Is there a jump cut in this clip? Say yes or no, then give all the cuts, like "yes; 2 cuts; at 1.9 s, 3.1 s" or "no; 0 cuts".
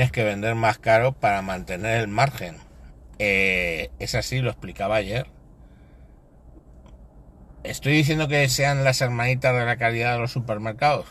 no; 0 cuts